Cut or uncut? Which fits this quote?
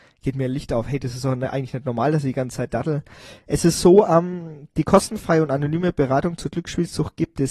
uncut